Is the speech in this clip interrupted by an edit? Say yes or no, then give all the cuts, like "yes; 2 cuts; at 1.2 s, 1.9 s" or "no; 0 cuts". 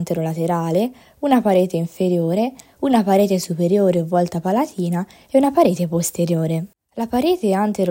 no; 0 cuts